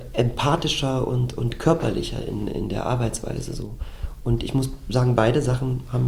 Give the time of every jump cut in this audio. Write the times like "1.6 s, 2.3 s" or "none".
2.5 s